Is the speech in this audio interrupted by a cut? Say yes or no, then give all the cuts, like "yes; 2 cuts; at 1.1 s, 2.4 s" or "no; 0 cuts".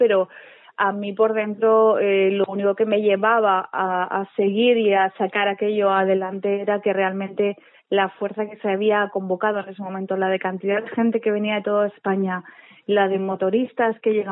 no; 0 cuts